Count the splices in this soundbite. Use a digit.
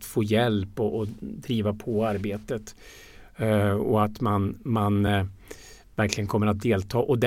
0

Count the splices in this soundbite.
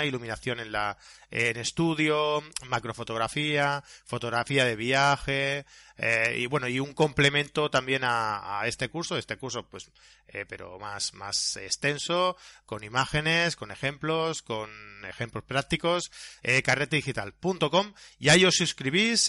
1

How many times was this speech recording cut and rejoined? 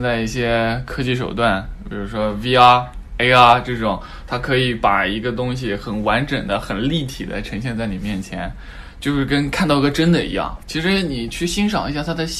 0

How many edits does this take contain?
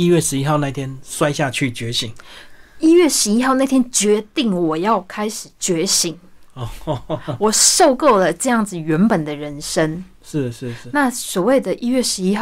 0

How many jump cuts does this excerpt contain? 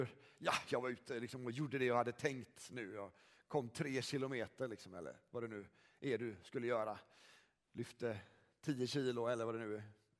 0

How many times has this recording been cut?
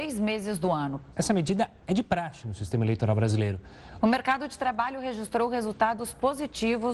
2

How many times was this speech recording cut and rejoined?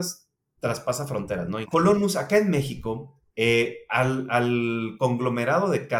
1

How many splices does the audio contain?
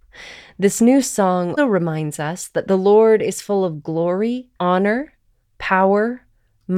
2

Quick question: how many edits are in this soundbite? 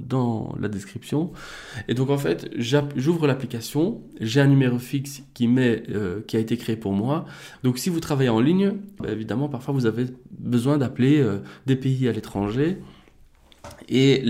2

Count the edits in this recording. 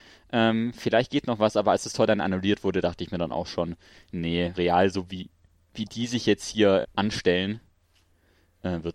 2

